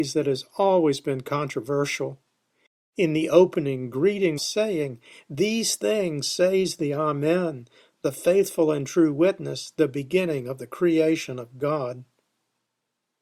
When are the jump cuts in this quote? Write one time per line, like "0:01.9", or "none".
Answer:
0:04.4